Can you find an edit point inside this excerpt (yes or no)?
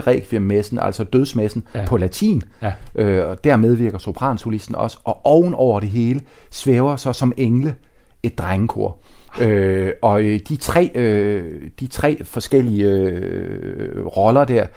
no